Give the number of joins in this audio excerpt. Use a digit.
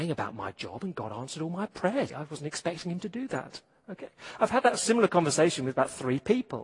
1